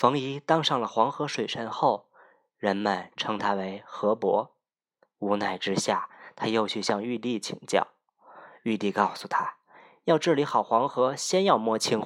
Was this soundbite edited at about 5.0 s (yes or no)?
yes